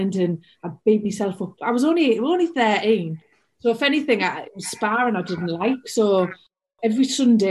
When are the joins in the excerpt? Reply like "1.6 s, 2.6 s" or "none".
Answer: none